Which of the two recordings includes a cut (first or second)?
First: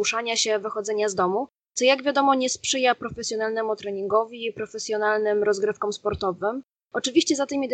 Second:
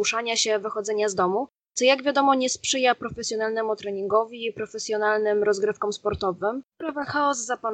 second